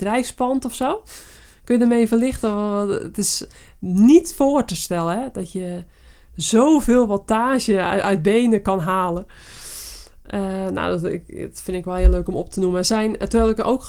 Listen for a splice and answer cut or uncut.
uncut